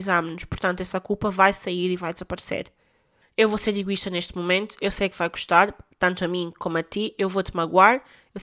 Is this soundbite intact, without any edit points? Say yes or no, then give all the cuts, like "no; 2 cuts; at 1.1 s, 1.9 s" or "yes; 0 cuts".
no; 1 cut; at 3.2 s